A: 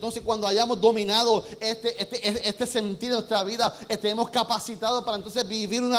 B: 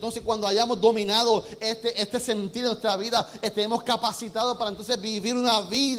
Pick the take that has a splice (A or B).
B